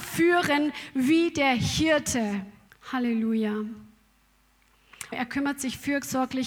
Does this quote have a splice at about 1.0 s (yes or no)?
no